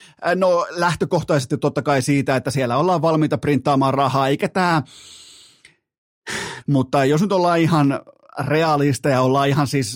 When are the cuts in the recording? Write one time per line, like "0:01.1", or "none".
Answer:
0:06.6